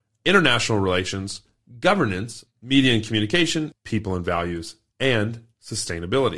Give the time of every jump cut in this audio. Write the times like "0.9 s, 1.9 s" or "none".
2.5 s, 3.7 s